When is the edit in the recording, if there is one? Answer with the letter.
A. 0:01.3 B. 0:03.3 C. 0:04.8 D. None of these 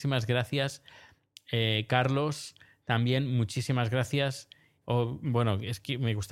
C